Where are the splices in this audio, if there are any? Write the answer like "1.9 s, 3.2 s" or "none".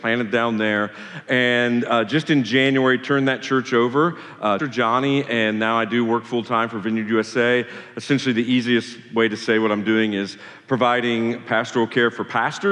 4.6 s

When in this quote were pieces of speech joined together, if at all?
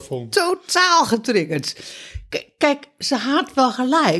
none

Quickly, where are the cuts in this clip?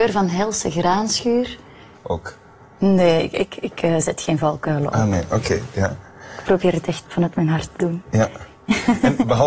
1.9 s, 7.0 s

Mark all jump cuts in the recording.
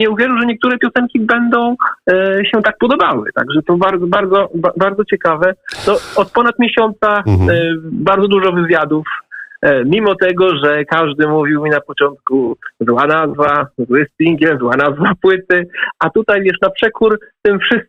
none

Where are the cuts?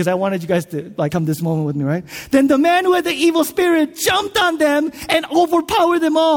1.1 s

